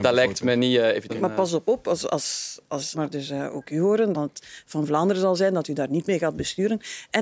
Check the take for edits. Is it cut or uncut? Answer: cut